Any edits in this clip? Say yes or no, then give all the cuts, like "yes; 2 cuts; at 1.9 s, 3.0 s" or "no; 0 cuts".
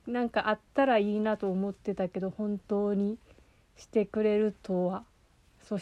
no; 0 cuts